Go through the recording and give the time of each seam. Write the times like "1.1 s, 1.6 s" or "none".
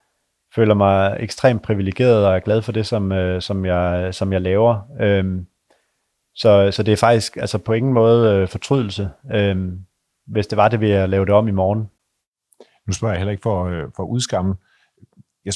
none